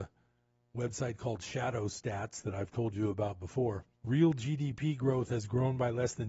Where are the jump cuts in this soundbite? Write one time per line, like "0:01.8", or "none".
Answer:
0:03.9